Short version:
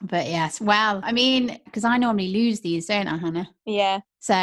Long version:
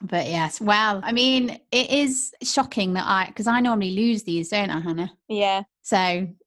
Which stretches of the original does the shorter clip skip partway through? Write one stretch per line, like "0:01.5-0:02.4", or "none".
0:01.7-0:03.3